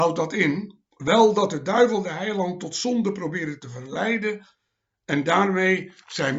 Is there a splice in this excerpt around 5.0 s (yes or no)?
no